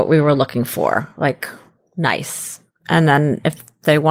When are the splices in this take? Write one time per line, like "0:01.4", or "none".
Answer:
none